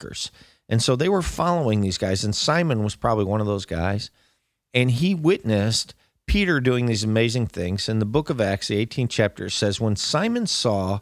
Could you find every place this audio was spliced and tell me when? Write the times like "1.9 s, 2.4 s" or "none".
none